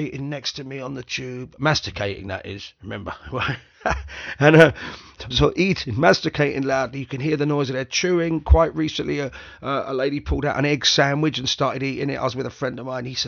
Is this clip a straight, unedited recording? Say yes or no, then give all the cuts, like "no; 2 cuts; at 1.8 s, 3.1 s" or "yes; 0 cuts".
no; 1 cut; at 5.3 s